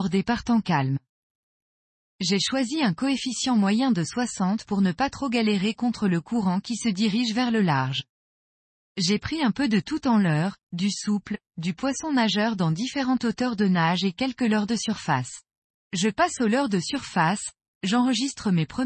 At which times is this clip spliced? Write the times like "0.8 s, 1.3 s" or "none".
15.8 s, 17.7 s